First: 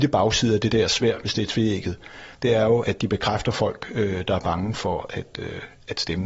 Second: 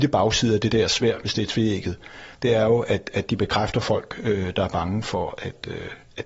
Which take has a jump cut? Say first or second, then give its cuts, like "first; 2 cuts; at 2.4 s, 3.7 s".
first; 1 cut; at 2.8 s